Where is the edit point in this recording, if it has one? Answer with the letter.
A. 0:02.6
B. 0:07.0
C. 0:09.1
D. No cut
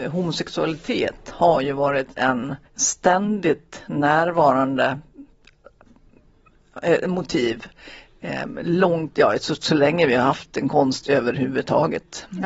A